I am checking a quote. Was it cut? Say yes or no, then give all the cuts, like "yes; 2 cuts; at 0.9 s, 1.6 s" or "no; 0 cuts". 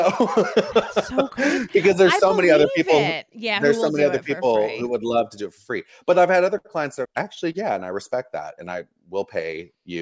yes; 1 cut; at 7.0 s